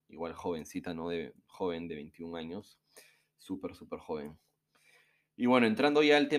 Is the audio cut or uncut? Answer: uncut